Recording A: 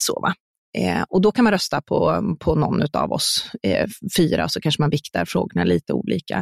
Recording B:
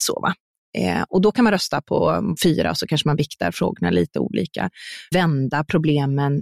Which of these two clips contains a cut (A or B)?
B